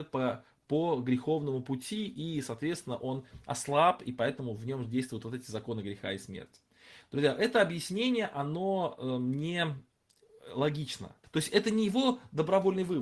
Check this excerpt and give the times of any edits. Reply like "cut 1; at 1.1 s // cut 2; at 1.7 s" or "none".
cut 1; at 11.2 s

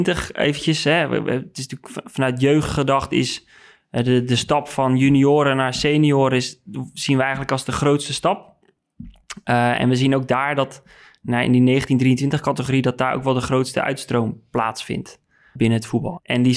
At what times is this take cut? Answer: cut 1; at 15.6 s

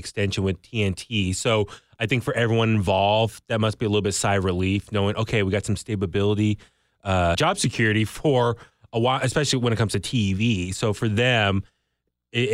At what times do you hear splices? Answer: cut 1; at 7.3 s

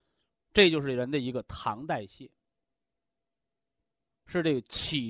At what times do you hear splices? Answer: cut 1; at 4.1 s

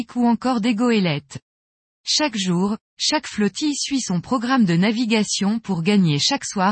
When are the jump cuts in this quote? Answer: none

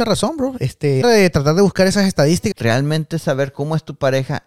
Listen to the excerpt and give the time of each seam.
cut 1; at 1.0 s // cut 2; at 2.5 s

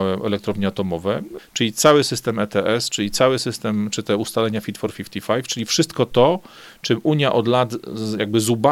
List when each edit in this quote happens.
cut 1; at 1.4 s

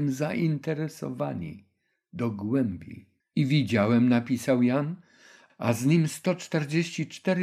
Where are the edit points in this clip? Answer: cut 1; at 3.2 s // cut 2; at 5.5 s

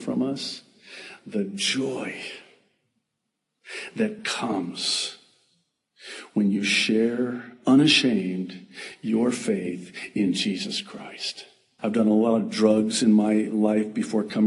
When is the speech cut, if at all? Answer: cut 1; at 11.8 s

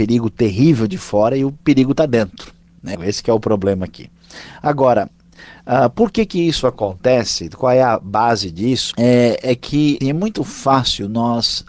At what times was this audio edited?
cut 1; at 2.9 s // cut 2; at 8.9 s // cut 3; at 10.0 s

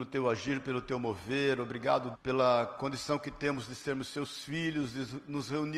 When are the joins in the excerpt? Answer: cut 1; at 2.1 s

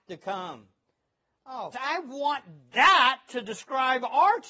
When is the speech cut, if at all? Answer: cut 1; at 1.7 s

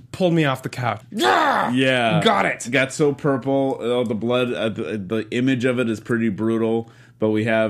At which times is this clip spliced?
cut 1; at 1.0 s

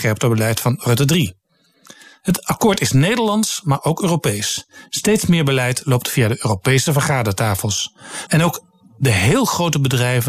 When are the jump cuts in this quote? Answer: cut 1; at 8.3 s

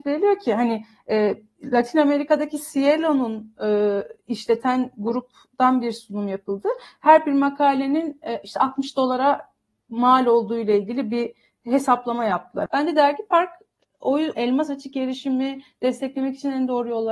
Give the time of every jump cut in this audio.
cut 1; at 12.7 s // cut 2; at 14.3 s

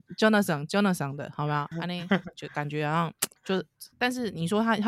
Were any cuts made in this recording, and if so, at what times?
cut 1; at 1.7 s // cut 2; at 3.4 s

